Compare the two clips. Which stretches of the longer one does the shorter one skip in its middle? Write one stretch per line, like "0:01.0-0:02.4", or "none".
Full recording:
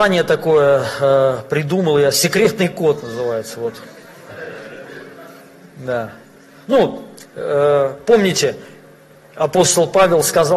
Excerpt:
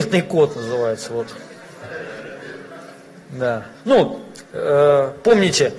0:06.2-0:06.6